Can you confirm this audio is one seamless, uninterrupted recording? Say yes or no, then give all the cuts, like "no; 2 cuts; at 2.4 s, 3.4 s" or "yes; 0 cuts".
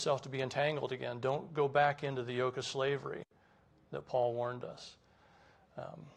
yes; 0 cuts